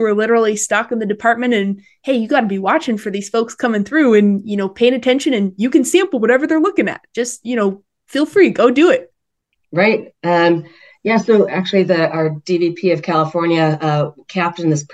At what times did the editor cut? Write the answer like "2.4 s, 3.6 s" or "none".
none